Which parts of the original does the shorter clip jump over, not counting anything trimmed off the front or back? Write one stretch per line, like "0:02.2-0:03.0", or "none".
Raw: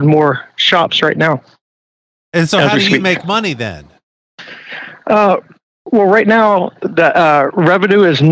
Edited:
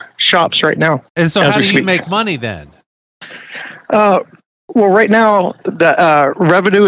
0:01.4-0:02.2